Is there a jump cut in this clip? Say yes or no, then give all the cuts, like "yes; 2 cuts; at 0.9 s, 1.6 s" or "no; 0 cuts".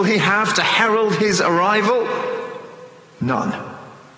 no; 0 cuts